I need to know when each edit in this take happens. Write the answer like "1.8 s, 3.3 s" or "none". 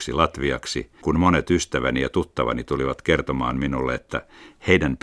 1.0 s